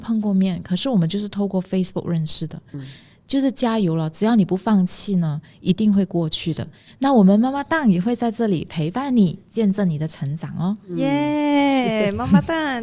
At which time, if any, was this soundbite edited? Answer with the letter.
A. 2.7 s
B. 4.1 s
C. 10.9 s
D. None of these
A